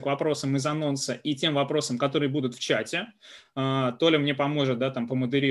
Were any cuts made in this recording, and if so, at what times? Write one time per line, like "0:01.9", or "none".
none

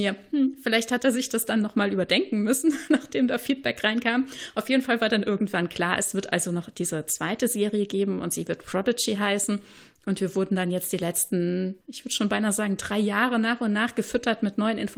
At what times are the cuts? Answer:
0:11.8

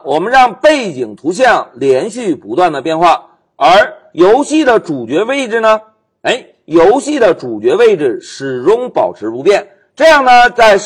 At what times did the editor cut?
none

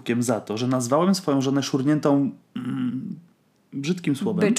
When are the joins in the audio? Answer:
none

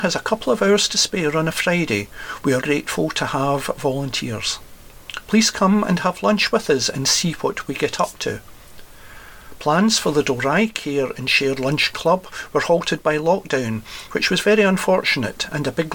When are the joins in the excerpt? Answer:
0:02.6
0:14.1

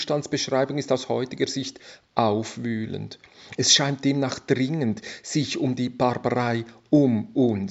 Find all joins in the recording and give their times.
0:03.6

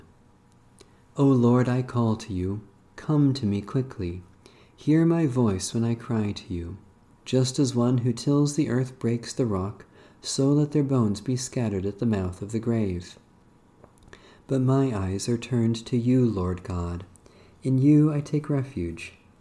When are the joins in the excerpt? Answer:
0:07.2

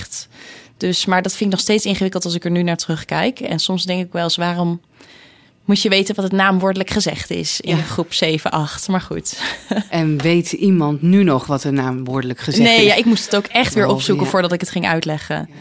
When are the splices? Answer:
none

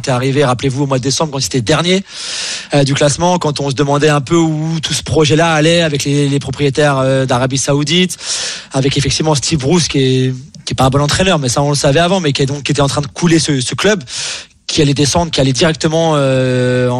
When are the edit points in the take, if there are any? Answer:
none

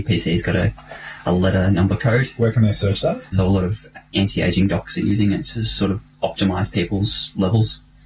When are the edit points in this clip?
0:03.3

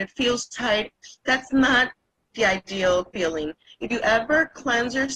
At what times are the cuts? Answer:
none

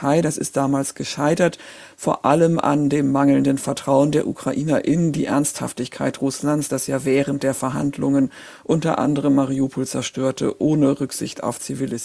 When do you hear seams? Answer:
none

